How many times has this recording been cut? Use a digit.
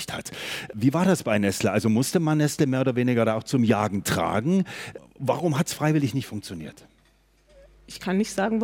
0